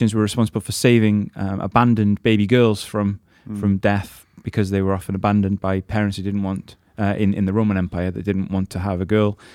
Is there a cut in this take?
no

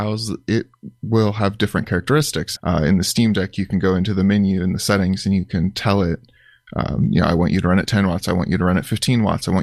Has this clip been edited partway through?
yes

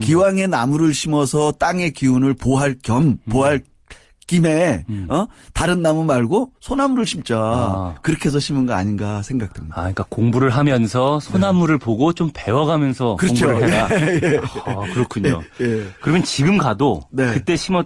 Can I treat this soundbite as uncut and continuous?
yes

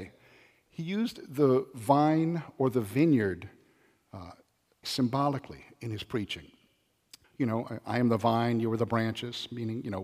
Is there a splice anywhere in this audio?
yes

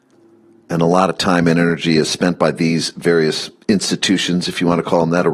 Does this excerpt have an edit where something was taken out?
no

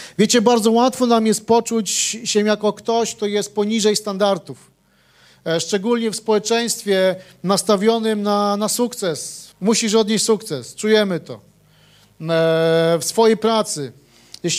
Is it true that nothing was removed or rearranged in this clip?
no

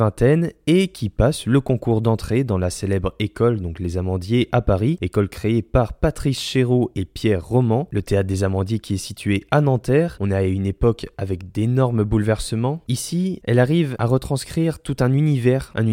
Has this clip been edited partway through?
yes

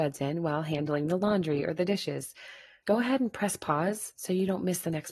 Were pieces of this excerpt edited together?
yes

